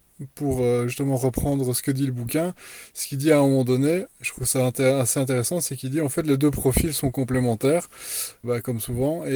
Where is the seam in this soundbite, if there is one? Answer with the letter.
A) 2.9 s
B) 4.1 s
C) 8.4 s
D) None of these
C